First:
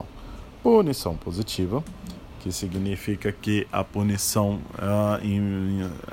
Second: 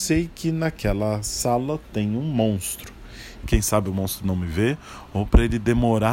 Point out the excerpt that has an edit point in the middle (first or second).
second